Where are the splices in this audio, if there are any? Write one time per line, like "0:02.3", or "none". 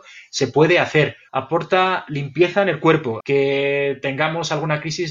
0:01.3
0:03.2

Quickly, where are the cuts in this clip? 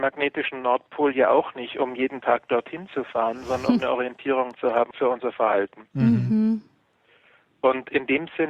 0:04.9

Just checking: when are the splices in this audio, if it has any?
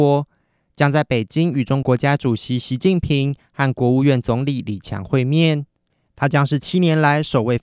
0:01.8

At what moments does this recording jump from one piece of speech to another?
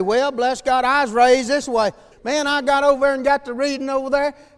0:02.1

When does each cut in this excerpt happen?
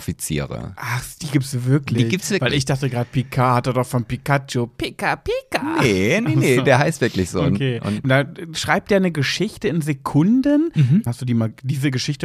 0:08.0
0:11.1

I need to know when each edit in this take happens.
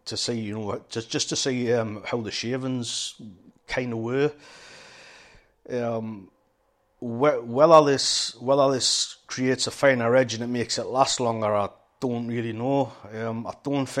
none

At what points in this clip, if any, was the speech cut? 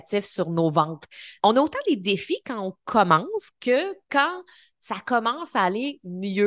0:01.4
0:03.5

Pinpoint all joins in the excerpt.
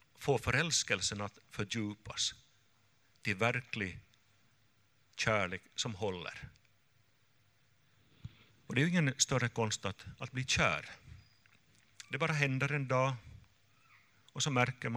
0:08.5

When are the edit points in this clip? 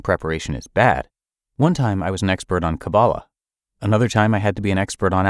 none

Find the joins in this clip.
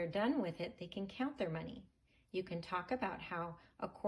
none

